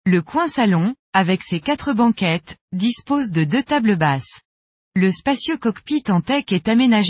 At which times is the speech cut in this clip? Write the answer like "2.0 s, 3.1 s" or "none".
4.9 s